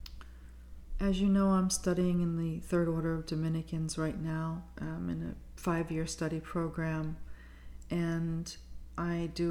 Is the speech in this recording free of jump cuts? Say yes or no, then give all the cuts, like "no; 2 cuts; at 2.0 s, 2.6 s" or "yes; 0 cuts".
yes; 0 cuts